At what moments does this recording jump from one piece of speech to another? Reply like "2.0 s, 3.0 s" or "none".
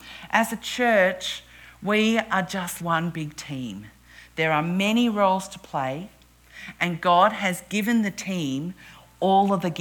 2.8 s